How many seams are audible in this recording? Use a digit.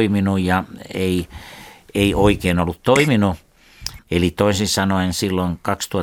1